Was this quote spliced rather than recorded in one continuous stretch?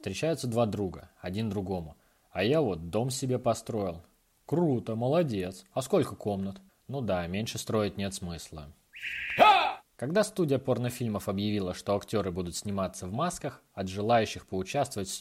yes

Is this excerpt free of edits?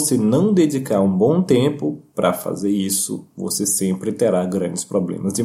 yes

